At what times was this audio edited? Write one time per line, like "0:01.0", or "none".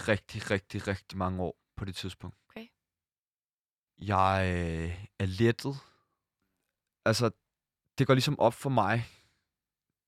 0:02.4